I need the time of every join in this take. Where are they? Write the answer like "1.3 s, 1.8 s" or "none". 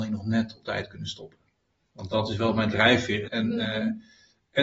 3.2 s